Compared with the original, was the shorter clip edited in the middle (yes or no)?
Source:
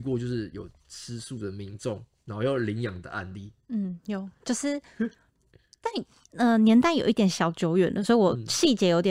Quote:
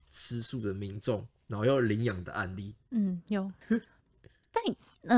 yes